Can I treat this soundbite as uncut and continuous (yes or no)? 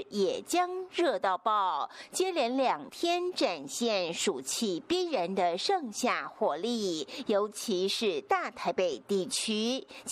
yes